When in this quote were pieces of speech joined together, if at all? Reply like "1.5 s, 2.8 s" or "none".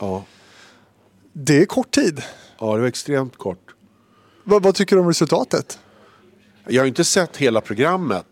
none